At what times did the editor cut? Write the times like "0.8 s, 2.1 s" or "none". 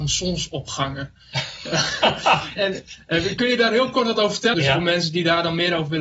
2.6 s, 4.5 s